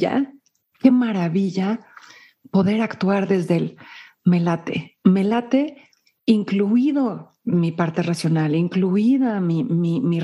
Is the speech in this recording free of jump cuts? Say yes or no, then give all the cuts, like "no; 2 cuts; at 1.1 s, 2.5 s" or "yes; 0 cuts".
yes; 0 cuts